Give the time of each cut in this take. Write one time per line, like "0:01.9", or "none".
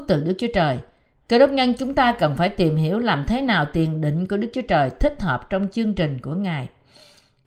none